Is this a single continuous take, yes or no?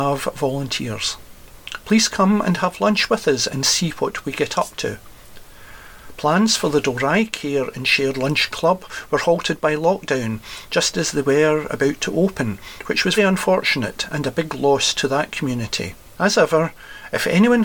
no